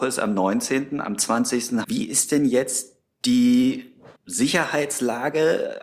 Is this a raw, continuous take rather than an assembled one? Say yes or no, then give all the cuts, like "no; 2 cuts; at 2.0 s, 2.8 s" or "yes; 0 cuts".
no; 2 cuts; at 1.8 s, 4.2 s